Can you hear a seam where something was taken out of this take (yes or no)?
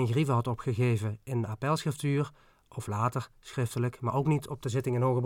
no